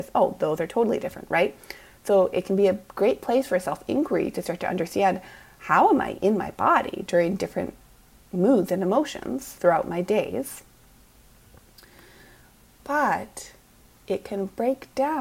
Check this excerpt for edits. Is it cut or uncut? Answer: uncut